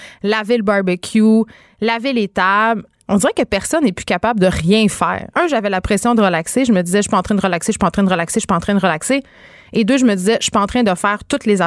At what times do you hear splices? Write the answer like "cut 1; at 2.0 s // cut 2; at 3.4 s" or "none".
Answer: cut 1; at 5.3 s